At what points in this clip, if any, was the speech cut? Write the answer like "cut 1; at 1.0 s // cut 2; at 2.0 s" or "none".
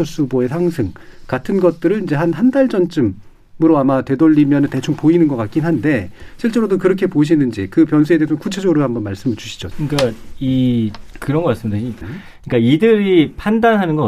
cut 1; at 9.7 s // cut 2; at 12.0 s